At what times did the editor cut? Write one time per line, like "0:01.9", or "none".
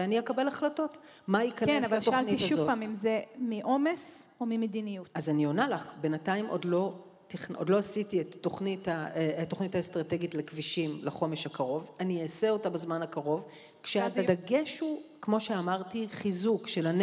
0:14.2